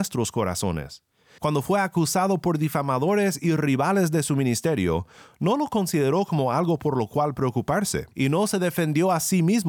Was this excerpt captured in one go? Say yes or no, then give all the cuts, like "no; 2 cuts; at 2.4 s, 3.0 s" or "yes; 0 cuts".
no; 2 cuts; at 1.4 s, 8.1 s